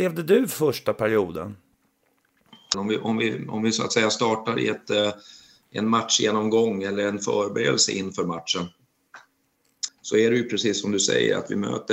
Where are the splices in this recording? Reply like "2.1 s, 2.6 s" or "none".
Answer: 2.7 s, 9.9 s